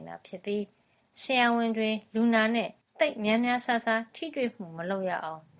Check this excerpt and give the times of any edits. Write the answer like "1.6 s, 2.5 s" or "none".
none